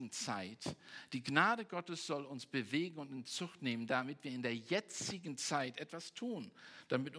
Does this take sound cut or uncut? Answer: uncut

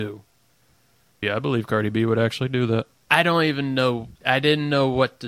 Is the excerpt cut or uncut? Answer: cut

